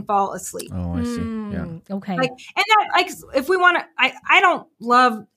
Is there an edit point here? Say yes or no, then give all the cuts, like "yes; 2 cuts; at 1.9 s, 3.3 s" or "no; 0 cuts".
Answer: no; 0 cuts